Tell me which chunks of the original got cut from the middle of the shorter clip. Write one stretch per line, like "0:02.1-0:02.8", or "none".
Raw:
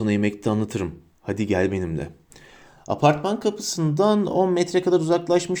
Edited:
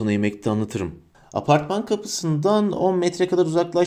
0:01.1-0:02.7